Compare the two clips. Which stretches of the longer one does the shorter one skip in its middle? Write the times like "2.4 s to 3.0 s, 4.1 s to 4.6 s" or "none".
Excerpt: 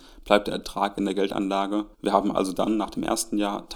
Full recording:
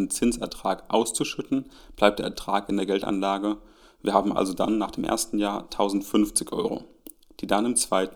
3.6 s to 3.9 s